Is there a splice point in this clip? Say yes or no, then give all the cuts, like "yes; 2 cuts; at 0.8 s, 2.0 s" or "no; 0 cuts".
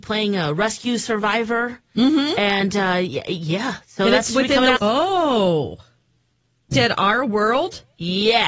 yes; 2 cuts; at 4.8 s, 6.7 s